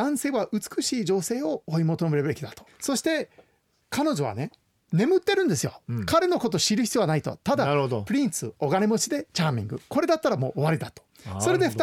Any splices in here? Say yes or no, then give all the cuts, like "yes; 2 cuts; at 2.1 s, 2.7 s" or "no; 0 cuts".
yes; 1 cut; at 2.7 s